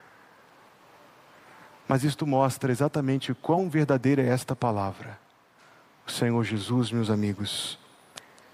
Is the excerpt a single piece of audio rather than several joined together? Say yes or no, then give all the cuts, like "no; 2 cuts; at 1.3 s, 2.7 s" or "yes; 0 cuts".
yes; 0 cuts